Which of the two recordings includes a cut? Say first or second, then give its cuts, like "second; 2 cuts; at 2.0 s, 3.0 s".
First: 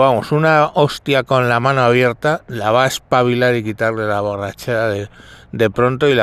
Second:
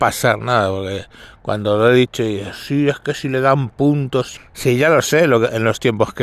second; 1 cut; at 4.4 s